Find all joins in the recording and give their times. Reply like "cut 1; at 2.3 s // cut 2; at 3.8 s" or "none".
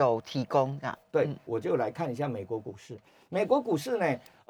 cut 1; at 1.5 s